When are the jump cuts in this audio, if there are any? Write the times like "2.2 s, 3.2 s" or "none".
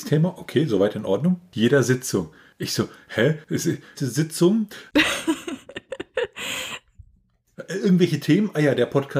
3.9 s